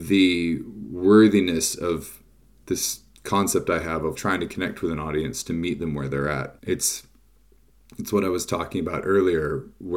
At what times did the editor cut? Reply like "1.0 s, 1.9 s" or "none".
4.2 s, 6.6 s